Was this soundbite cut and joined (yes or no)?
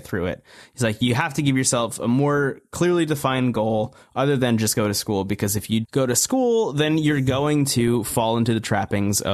yes